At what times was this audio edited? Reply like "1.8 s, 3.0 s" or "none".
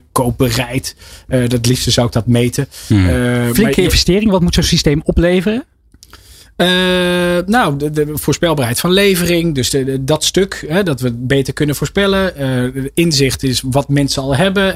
none

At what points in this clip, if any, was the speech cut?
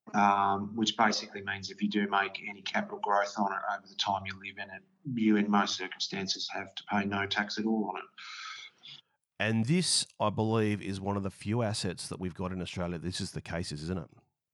none

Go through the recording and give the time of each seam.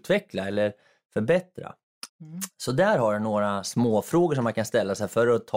2.1 s

